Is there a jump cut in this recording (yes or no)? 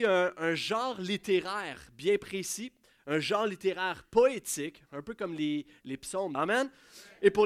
yes